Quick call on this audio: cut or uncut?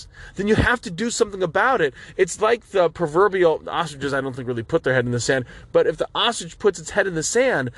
uncut